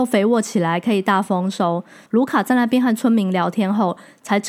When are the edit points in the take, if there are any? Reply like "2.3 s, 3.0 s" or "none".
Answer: 2.1 s